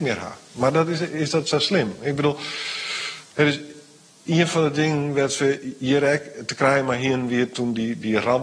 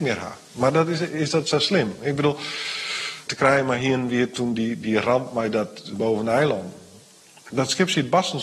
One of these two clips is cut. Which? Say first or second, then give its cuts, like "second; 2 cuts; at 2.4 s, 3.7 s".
second; 2 cuts; at 3.3 s, 5.9 s